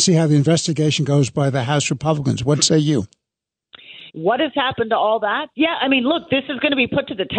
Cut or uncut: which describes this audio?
cut